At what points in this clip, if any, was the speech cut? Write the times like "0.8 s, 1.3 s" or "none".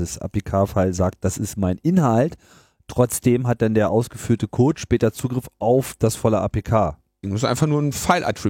7.2 s